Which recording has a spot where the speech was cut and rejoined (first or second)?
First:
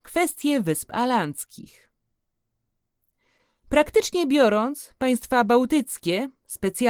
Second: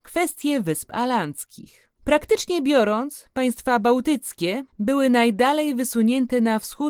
second